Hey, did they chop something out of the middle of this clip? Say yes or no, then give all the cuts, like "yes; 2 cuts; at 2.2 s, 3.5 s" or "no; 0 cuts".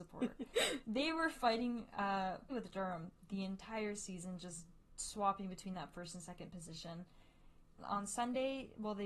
yes; 2 cuts; at 2.5 s, 7.8 s